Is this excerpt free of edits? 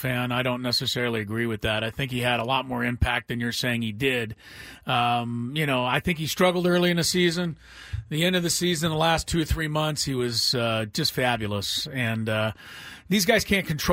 yes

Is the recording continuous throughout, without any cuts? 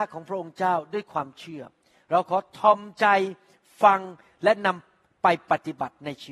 yes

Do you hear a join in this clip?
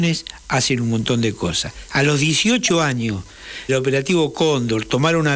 yes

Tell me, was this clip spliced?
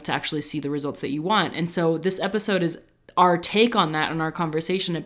no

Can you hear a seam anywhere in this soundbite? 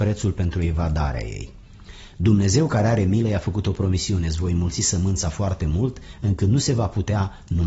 no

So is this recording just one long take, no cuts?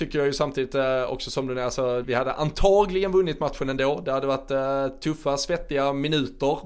no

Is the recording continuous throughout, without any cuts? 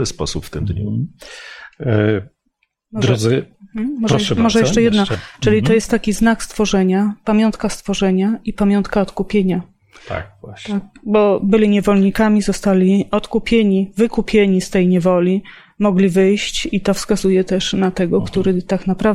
yes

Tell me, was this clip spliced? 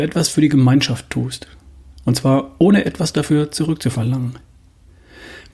no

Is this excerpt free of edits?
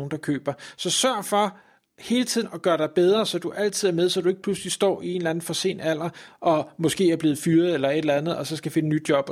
yes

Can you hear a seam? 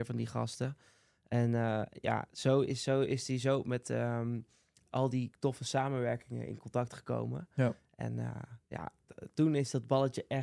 no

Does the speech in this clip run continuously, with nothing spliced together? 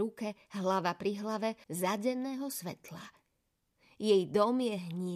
no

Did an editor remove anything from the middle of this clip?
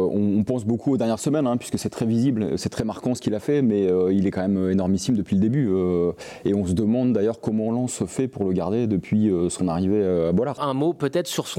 yes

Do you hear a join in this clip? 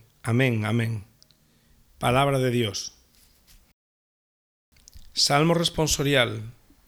yes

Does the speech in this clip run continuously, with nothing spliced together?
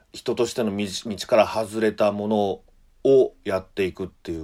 yes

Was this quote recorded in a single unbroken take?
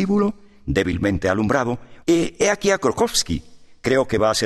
no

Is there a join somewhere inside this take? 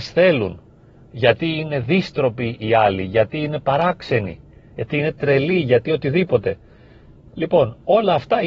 no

